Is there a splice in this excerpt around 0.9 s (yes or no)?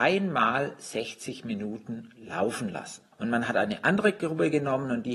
no